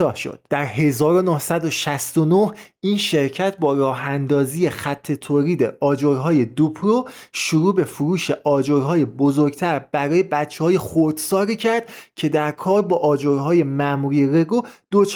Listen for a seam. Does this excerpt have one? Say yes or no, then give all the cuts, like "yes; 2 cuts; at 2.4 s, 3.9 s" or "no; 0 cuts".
no; 0 cuts